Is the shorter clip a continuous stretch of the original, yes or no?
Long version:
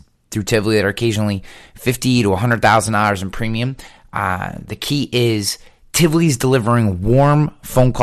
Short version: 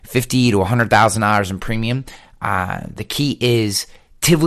yes